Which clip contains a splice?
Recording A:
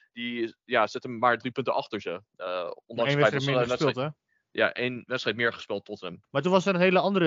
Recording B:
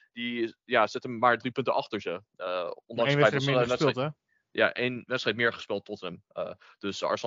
A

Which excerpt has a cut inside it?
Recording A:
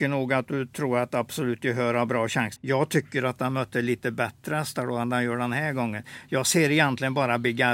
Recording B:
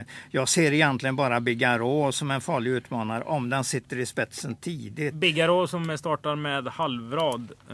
A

